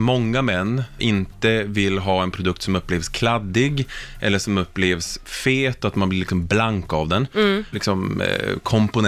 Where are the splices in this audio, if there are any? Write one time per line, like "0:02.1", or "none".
0:01.0
0:07.7